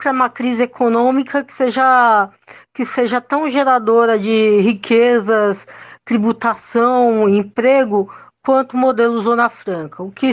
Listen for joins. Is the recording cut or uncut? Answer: uncut